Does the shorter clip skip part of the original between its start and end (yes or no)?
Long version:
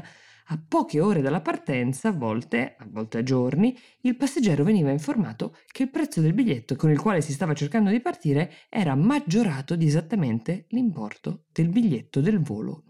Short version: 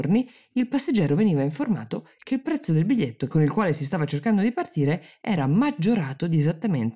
no